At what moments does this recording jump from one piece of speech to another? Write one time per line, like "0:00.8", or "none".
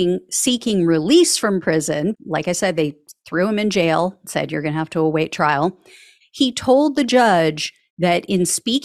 0:02.1
0:06.2